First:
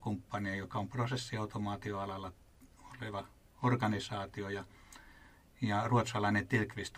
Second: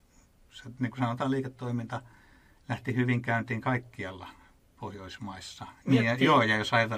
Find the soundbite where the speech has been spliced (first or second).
second